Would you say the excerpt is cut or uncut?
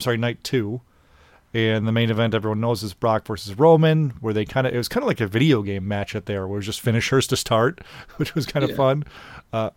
uncut